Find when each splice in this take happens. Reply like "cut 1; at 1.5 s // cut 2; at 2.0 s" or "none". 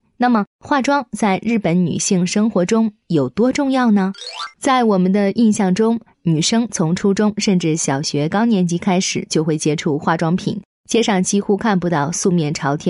cut 1; at 6.1 s